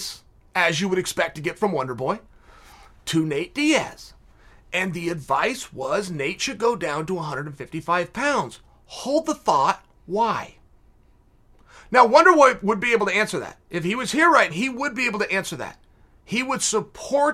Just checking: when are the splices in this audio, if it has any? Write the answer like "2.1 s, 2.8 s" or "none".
14.5 s